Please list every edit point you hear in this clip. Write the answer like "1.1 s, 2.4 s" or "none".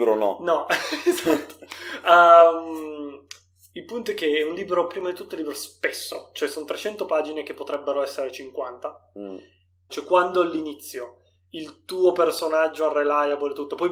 9.9 s